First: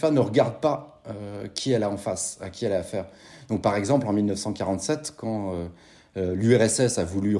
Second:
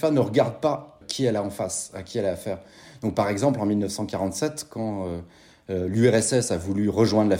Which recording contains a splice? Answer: second; 1 cut; at 1.0 s

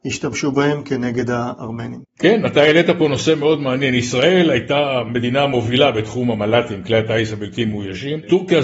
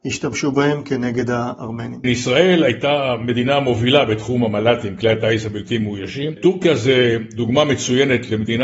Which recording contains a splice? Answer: second; 1 cut; at 2.0 s

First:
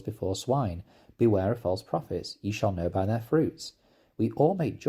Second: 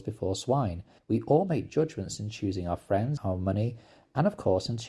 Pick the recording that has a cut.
second; 2 cuts; at 1.0 s, 3.2 s

